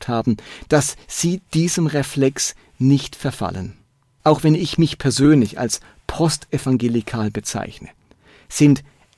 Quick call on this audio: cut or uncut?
cut